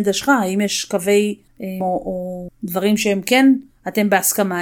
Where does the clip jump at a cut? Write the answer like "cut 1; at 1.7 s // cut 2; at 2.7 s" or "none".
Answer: cut 1; at 1.8 s